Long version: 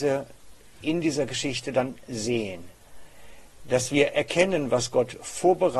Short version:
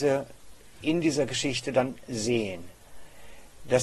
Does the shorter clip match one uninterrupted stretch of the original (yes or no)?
yes